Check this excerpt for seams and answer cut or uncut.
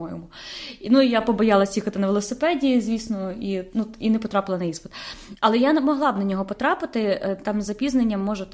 uncut